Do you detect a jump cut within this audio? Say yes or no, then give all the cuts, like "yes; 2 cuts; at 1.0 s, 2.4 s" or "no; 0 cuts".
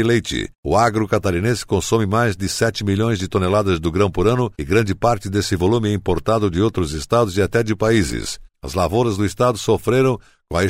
yes; 1 cut; at 8.5 s